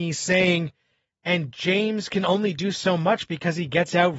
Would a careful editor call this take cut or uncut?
uncut